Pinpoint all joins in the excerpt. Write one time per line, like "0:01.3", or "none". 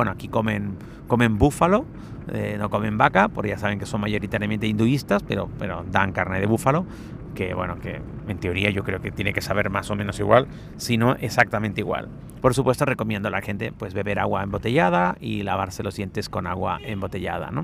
0:12.4